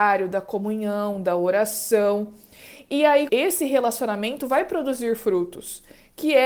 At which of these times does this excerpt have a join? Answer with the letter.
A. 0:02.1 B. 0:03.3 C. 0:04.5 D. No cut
B